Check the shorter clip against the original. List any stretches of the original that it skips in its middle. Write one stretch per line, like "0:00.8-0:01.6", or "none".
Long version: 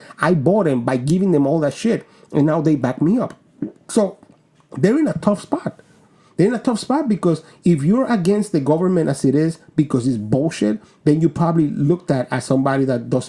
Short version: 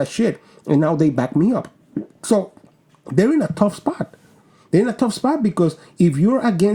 none